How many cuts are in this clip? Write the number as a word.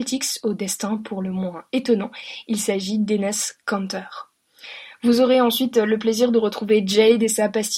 zero